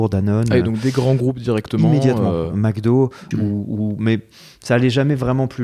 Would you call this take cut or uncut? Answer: cut